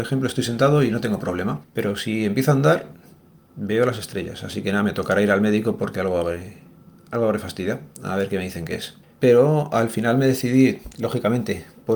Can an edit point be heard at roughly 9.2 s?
yes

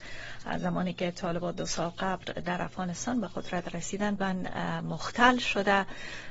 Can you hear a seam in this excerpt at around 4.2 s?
yes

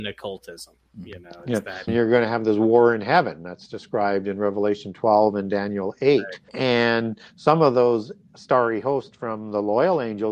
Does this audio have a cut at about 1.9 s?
yes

